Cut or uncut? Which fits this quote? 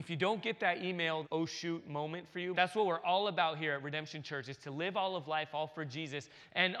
cut